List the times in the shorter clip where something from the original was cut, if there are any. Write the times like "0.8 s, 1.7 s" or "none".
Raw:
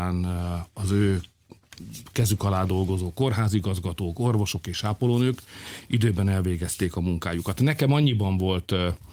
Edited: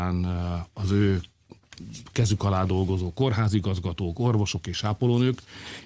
none